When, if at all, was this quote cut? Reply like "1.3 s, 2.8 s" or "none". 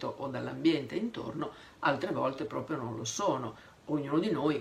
none